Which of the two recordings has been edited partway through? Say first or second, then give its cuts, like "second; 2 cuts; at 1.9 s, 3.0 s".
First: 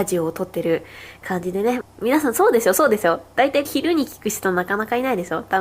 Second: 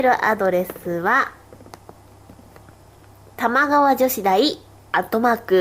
first; 2 cuts; at 1.8 s, 3.6 s